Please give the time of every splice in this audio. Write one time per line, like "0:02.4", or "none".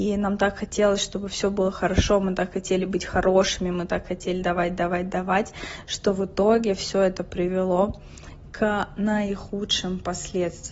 0:04.4